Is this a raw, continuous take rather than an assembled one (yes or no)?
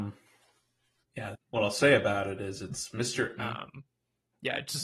no